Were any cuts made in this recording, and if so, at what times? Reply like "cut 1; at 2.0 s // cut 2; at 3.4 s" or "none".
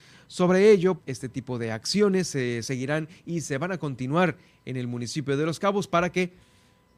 cut 1; at 1.0 s